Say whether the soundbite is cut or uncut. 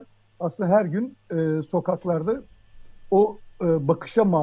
uncut